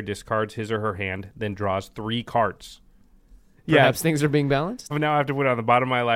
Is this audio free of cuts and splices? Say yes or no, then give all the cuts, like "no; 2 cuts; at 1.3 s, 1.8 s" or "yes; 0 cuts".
no; 2 cuts; at 3.6 s, 4.9 s